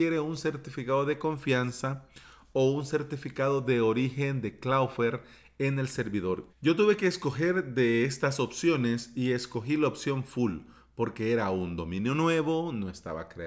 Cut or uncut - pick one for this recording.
cut